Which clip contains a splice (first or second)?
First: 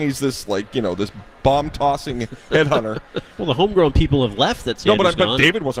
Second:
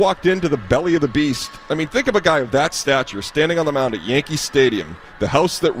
first